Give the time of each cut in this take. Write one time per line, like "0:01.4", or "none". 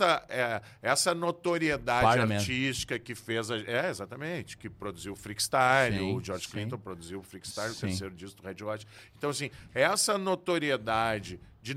none